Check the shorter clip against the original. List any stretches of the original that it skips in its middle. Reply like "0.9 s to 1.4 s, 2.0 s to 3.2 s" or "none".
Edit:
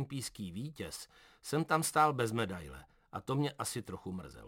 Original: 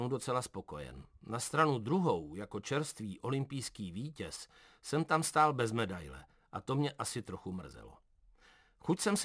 none

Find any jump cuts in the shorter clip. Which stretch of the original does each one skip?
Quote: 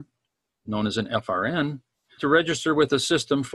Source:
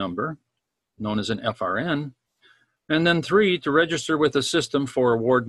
2.5 s to 3.6 s

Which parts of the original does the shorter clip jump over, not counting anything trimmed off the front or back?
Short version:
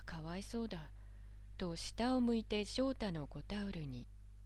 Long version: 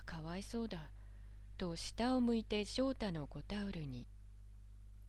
none

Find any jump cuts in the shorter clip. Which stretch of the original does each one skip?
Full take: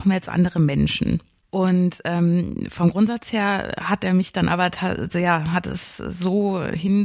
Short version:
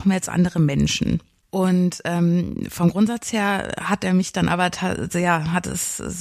none

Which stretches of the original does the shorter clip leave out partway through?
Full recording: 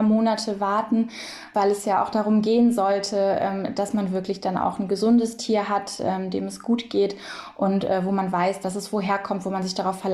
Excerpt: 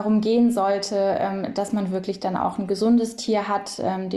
none

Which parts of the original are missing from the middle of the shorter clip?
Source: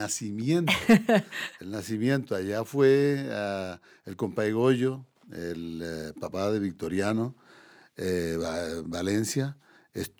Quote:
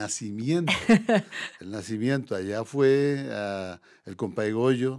none

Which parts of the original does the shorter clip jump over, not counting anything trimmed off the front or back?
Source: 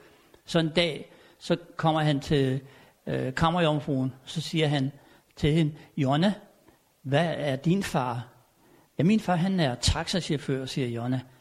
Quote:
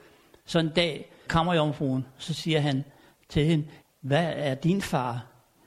1.3 s to 3.3 s, 5.9 s to 6.8 s

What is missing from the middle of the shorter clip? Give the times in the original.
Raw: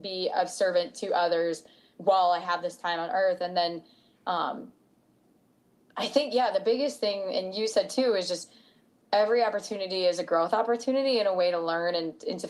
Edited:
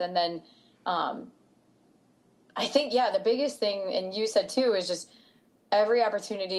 none

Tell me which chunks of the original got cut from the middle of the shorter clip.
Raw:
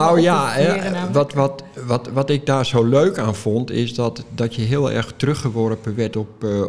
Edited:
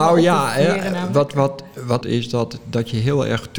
2.0 s to 3.7 s

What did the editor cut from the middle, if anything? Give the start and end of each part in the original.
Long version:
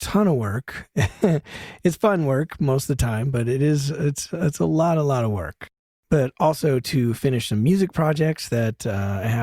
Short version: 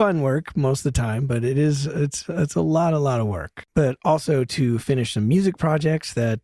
5.7 s to 6.0 s

